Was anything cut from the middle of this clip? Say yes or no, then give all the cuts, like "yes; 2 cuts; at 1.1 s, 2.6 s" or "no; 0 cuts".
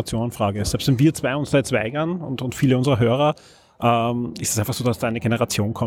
no; 0 cuts